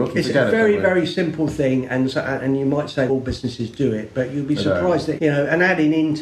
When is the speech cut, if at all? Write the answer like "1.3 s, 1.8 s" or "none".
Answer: 3.1 s, 5.2 s

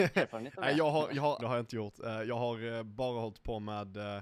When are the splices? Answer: 1.4 s

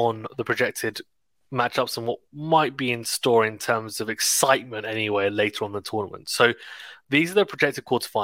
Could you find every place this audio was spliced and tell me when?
none

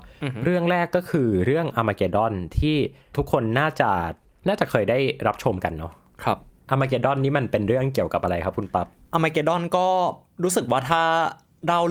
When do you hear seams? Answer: none

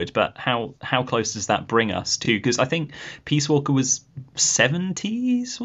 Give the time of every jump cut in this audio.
none

